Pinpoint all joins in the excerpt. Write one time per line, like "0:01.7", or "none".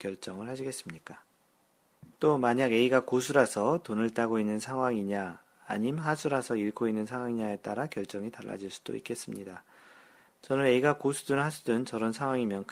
0:02.1